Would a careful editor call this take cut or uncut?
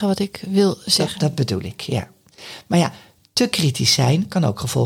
uncut